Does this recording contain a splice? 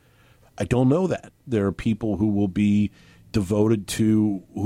yes; 1 cut; at 1.4 s

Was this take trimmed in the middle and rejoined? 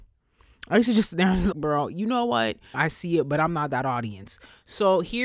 yes; 2 cuts; at 1.5 s, 2.7 s

